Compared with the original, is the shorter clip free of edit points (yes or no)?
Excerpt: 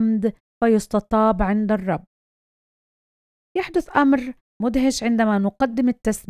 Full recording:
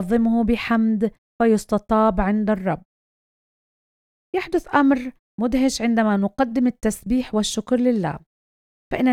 yes